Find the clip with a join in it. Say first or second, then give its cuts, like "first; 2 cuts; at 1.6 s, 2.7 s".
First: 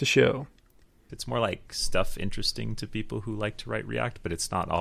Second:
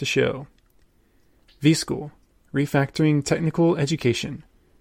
first; 1 cut; at 1.1 s